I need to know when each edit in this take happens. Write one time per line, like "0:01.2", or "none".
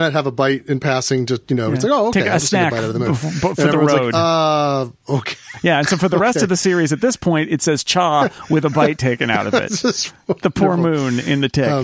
none